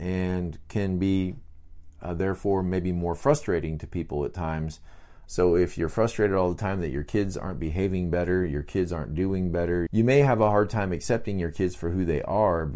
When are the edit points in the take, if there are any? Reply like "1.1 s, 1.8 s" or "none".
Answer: 5.3 s, 9.9 s